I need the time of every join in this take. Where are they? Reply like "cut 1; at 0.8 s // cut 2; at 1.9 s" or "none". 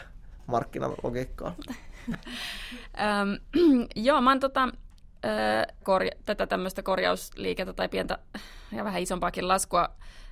cut 1; at 1.7 s // cut 2; at 5.8 s